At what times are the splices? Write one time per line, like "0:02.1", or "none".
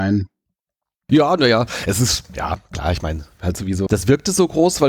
0:01.1
0:03.9